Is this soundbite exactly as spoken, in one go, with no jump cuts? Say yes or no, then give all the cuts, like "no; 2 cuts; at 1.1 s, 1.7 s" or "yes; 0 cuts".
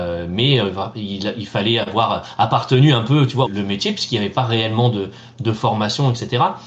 no; 1 cut; at 3.4 s